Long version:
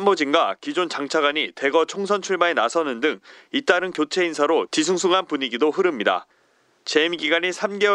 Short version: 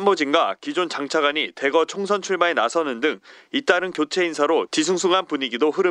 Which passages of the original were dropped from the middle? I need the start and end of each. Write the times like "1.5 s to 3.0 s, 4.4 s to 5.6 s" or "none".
none

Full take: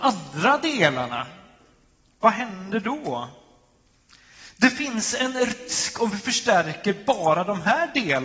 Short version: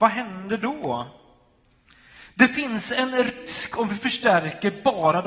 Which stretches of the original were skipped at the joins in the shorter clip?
none

